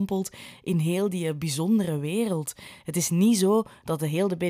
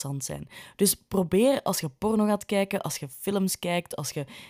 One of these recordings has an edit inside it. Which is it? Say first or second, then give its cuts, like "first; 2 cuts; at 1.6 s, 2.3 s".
first; 1 cut; at 2.8 s